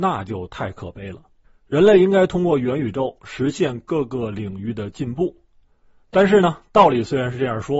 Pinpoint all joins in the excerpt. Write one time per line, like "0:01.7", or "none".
none